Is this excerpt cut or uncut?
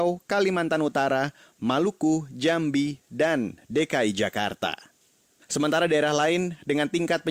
cut